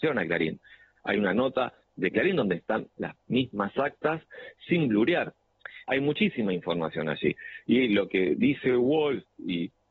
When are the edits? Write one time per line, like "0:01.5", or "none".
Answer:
0:05.8